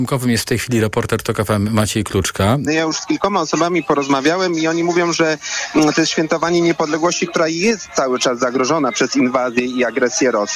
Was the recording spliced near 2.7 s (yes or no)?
yes